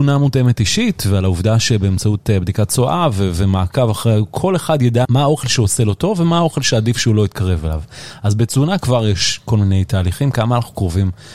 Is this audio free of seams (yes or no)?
no